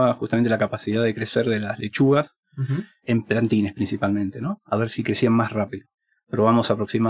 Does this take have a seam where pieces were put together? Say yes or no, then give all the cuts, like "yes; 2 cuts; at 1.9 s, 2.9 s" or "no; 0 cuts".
no; 0 cuts